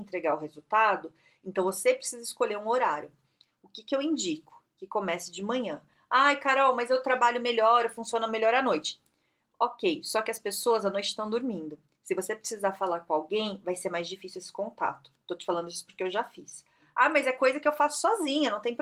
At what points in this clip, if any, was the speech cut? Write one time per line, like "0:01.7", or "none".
none